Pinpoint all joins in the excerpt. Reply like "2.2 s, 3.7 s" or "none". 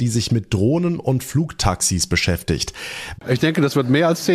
3.2 s